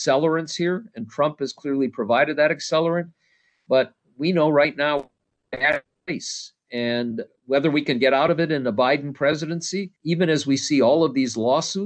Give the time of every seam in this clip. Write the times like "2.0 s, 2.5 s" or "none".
7.3 s, 10.0 s